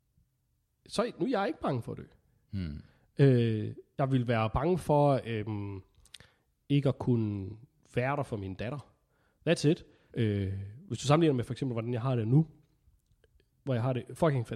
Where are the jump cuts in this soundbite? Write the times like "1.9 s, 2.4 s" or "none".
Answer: 10.1 s